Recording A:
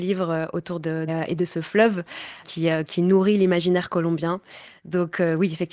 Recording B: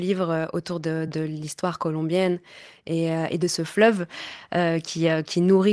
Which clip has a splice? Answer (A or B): A